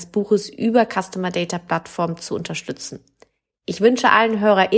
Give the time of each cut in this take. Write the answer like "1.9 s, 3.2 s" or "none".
none